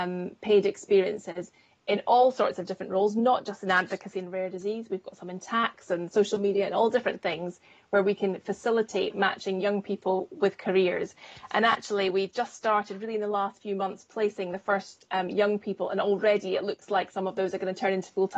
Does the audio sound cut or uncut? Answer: uncut